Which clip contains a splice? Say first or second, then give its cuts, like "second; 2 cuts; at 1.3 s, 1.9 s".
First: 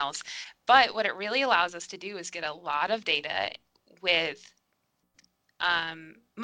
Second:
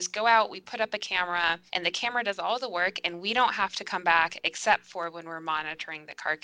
second; 1 cut; at 1.7 s